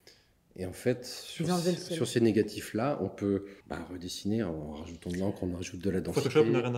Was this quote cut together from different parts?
yes; 1 cut; at 3.6 s

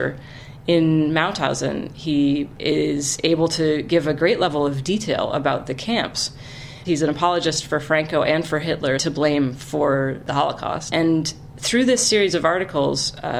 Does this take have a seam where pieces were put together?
yes; 3 cuts; at 6.8 s, 9.0 s, 10.9 s

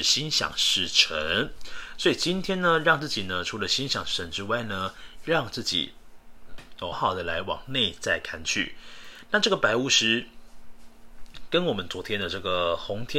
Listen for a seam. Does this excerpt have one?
yes; 1 cut; at 6.9 s

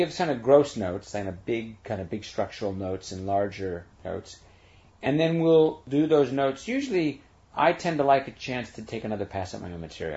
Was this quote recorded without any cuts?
yes; 0 cuts

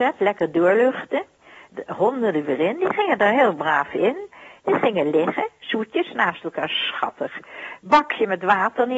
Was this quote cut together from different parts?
no; 0 cuts

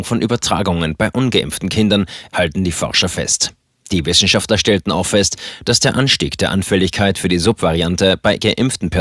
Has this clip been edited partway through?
yes; 1 cut; at 2.3 s

